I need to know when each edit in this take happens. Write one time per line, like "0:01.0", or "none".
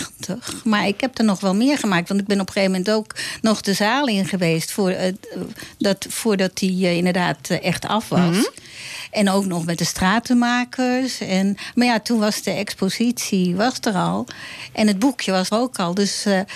0:15.5